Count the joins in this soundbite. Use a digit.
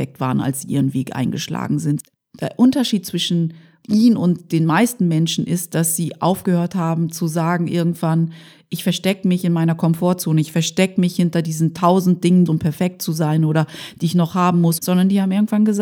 2